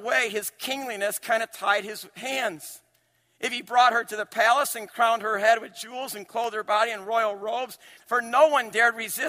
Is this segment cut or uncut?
cut